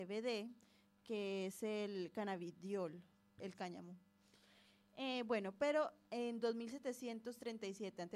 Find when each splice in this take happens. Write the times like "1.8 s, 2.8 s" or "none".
3.4 s